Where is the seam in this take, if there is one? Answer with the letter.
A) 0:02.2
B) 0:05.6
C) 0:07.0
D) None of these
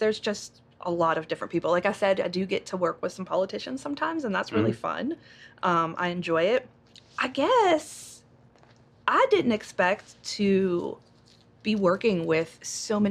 C